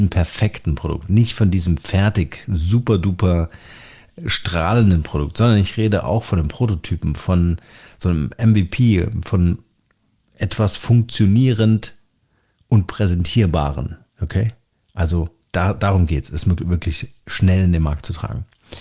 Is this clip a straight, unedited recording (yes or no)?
yes